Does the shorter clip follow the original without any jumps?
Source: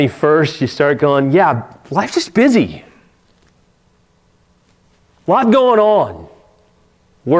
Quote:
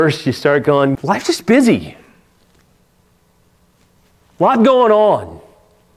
no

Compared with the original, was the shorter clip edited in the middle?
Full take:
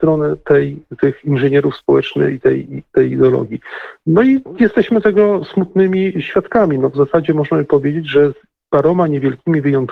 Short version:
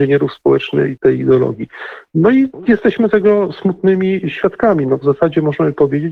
yes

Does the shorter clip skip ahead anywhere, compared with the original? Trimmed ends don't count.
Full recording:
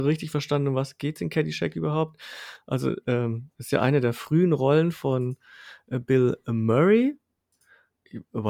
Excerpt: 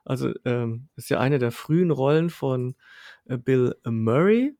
no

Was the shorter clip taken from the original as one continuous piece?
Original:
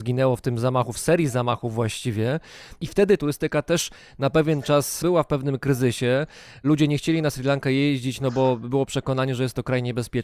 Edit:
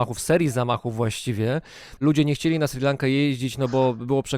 no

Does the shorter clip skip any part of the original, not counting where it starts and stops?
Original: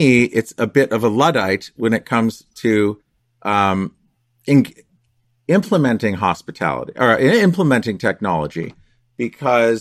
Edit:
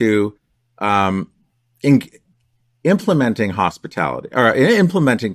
no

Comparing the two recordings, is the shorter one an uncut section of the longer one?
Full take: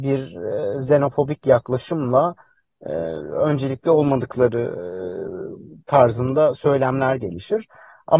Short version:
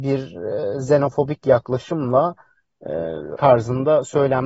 no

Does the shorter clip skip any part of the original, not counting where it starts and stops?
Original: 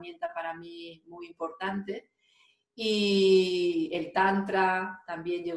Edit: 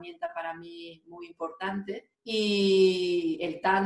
yes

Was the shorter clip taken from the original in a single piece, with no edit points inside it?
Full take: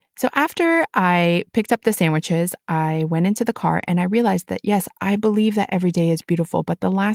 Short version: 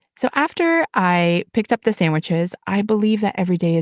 no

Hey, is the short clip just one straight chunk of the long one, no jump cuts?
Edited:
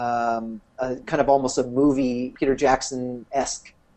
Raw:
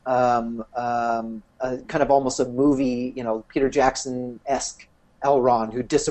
no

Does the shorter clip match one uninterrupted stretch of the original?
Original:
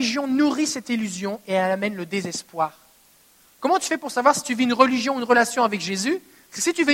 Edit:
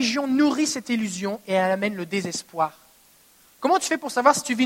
yes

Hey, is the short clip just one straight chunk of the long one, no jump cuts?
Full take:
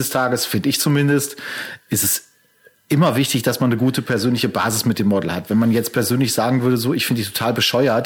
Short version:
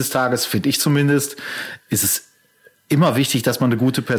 yes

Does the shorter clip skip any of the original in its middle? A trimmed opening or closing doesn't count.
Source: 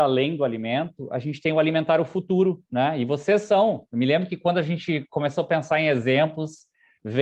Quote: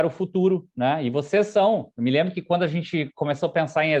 no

